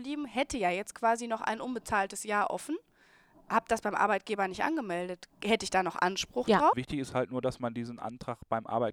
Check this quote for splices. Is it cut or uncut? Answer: cut